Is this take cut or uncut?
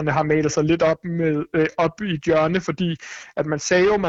uncut